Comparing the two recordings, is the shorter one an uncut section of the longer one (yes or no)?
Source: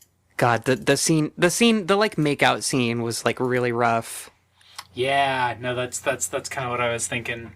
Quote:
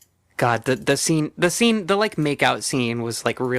yes